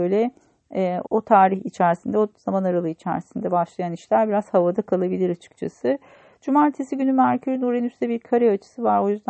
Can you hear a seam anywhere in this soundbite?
yes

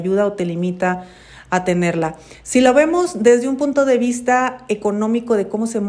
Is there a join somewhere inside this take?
no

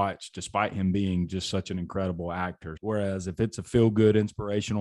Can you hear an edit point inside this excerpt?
yes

